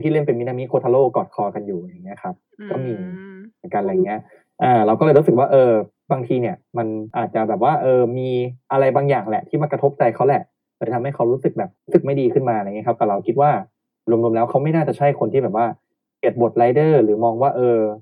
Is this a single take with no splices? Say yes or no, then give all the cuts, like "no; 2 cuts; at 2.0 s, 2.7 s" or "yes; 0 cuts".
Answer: yes; 0 cuts